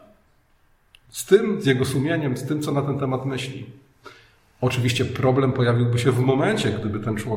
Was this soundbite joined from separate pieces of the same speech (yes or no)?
no